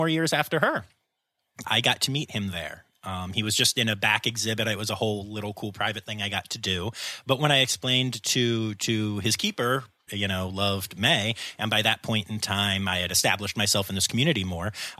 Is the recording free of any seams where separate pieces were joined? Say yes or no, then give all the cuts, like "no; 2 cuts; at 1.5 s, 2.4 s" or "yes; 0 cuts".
no; 2 cuts; at 1.6 s, 10.1 s